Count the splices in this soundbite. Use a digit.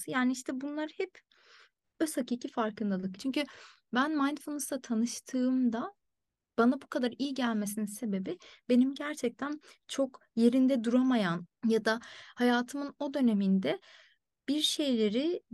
2